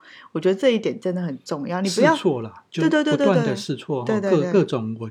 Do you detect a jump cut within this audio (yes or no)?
no